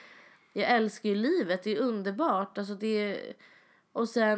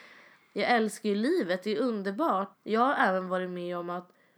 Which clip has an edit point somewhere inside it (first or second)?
second